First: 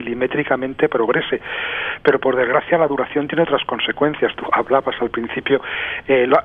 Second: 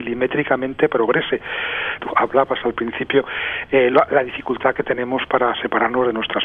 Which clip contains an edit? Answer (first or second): second